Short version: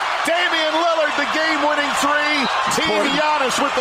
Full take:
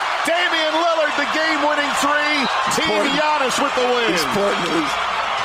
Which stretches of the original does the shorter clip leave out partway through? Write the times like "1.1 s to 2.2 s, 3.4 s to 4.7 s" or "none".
none